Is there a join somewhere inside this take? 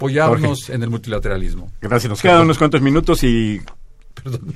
no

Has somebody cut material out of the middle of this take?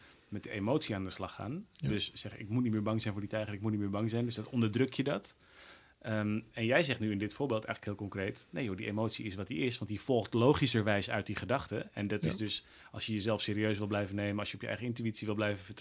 no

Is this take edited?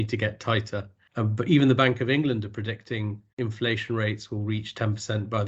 yes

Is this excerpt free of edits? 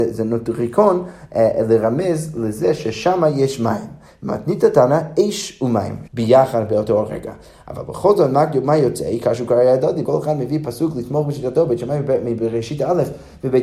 no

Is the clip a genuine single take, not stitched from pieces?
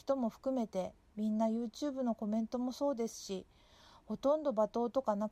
yes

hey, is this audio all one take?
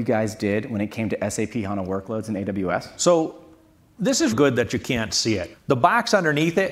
no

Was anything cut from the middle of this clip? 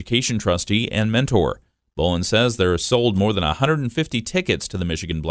no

